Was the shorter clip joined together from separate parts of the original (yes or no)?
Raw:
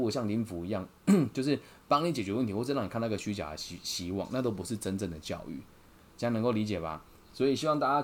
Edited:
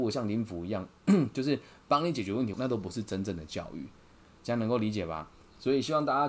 yes